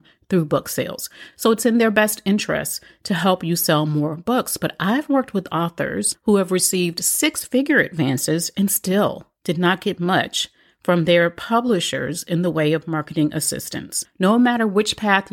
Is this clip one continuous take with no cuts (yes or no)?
yes